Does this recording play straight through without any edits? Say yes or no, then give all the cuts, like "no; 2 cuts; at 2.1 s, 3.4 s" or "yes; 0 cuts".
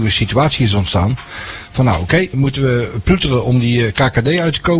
no; 1 cut; at 2.3 s